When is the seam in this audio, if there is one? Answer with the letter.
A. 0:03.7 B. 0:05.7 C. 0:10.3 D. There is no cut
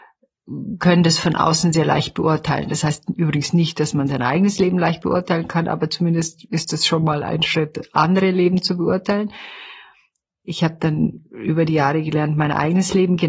D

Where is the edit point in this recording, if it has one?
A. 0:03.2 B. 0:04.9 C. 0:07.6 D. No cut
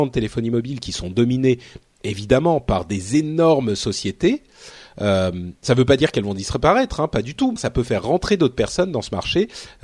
C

